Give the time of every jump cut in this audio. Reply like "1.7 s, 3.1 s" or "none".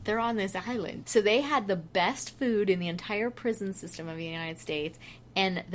1.0 s